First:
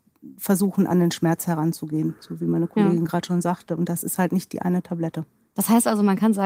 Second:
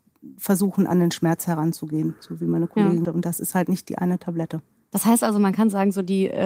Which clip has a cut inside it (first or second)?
second